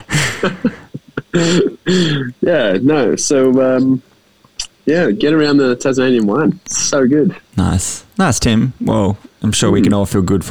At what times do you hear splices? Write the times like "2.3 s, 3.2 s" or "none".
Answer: none